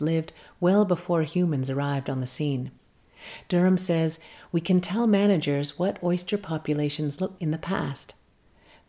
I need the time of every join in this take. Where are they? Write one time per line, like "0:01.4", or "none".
0:07.4

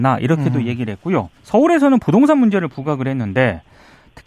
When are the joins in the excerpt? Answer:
0:01.4

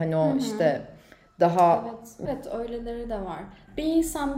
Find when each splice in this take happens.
0:02.2

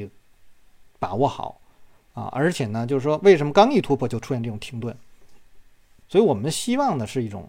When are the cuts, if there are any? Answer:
0:06.0

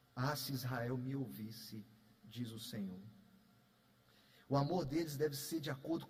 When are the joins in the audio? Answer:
none

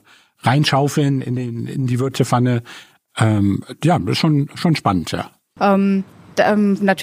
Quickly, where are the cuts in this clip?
0:05.6

